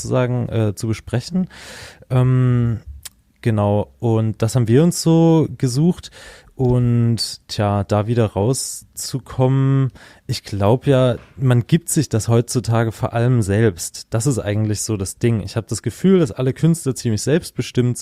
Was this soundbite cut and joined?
no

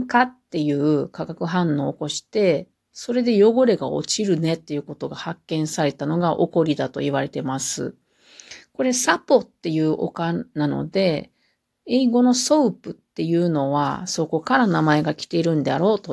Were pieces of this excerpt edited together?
no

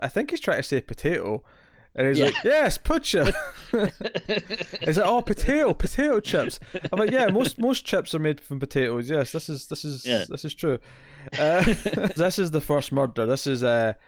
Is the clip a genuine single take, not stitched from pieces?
no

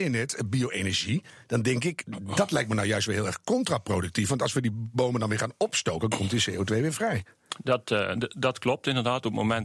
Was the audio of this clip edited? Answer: no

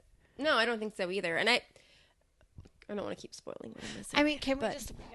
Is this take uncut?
yes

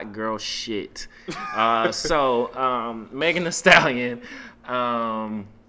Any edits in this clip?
no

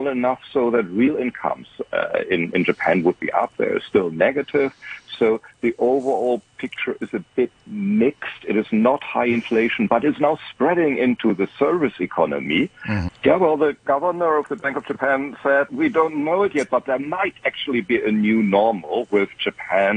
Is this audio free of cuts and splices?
no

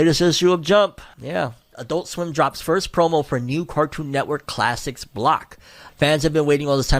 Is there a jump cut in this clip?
yes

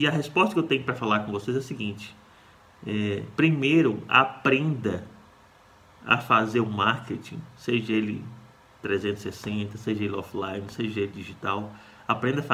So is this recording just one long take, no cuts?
yes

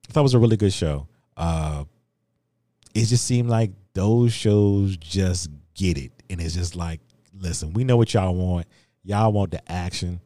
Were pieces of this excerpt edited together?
yes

